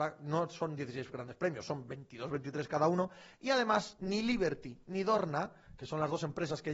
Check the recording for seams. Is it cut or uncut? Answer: uncut